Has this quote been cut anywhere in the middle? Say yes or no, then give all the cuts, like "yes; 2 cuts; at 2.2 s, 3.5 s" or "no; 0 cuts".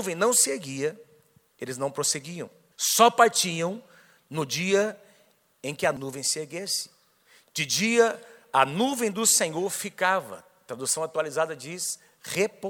no; 0 cuts